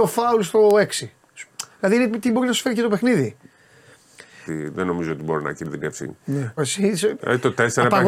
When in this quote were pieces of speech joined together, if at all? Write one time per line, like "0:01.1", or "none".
0:04.5
0:06.6